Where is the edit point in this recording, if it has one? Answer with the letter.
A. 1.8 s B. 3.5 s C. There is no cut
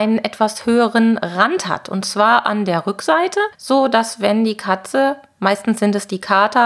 C